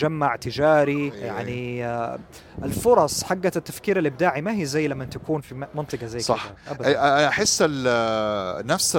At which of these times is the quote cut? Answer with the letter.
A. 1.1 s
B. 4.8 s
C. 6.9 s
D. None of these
A